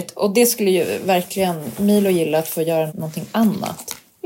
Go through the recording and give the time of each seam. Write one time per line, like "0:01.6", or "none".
0:02.9